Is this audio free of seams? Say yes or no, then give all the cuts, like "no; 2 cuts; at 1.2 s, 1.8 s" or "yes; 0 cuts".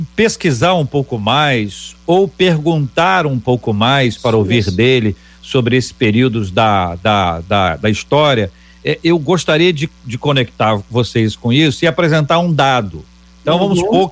yes; 0 cuts